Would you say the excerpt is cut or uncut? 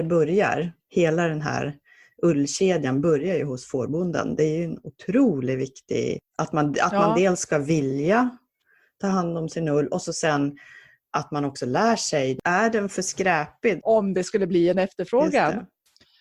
cut